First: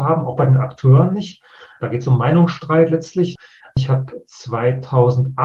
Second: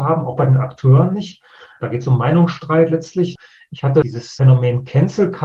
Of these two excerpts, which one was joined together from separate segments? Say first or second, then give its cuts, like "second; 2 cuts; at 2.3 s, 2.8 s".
first; 1 cut; at 3.6 s